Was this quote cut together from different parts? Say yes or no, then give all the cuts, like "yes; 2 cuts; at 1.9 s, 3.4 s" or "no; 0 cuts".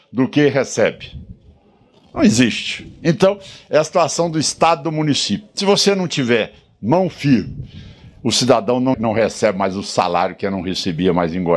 yes; 1 cut; at 8.9 s